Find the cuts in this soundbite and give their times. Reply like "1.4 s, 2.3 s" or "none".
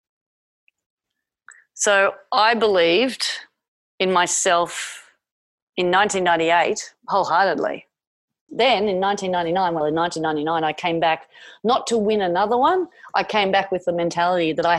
8.5 s, 9.8 s